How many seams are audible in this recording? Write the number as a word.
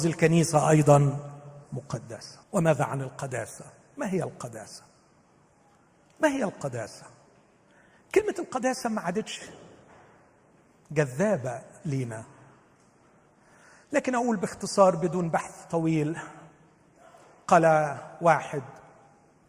one